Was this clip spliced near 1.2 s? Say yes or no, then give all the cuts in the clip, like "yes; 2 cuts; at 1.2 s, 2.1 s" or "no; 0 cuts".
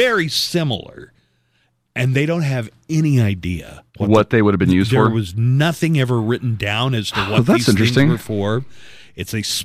no; 1 cut; at 3.9 s